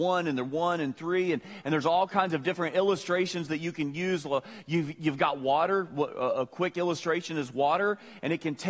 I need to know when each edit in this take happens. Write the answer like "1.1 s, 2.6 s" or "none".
none